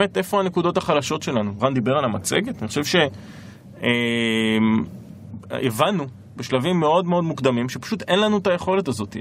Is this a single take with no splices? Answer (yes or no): yes